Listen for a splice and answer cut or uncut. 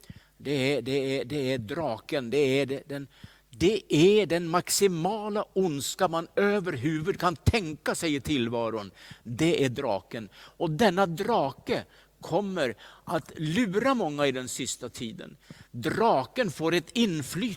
uncut